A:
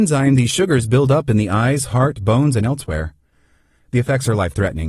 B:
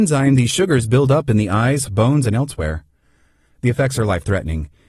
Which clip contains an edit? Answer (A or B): B